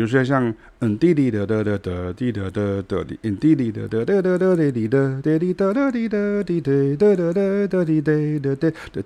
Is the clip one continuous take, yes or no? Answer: yes